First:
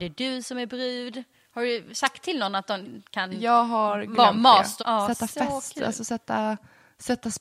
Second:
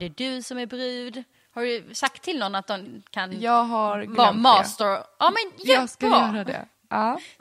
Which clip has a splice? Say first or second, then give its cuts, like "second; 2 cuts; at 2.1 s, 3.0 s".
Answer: first; 1 cut; at 4.8 s